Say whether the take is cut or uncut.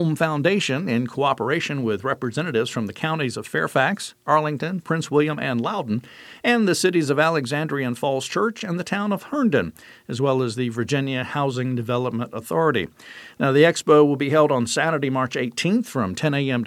uncut